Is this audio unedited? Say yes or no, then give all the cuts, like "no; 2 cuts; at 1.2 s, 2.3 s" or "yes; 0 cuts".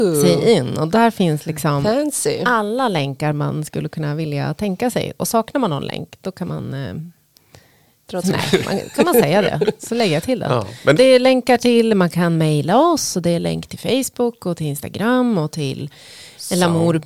no; 2 cuts; at 8.2 s, 11.0 s